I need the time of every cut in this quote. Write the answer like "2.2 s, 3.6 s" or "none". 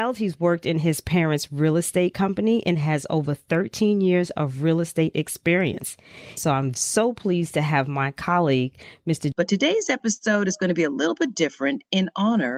6.4 s, 9.3 s